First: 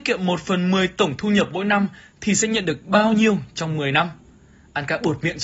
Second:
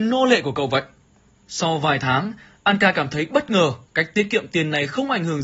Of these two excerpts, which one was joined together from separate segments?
second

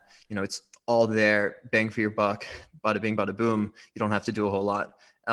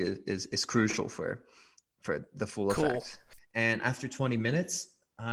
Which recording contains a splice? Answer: second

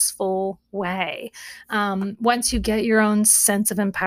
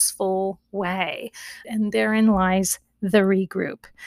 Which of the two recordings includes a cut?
second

